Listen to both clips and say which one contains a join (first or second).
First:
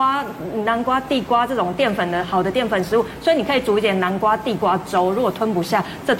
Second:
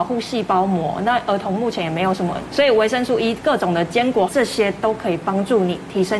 second